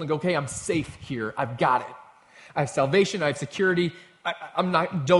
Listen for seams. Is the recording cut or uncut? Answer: uncut